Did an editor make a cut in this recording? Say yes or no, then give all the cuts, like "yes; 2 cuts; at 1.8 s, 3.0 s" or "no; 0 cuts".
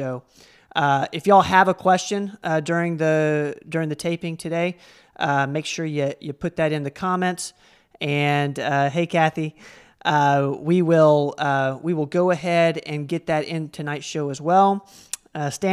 no; 0 cuts